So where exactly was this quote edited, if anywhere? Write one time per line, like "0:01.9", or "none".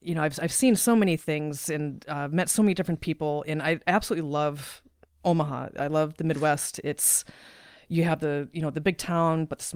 none